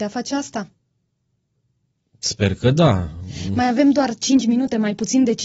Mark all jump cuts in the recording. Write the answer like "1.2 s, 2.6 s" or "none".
none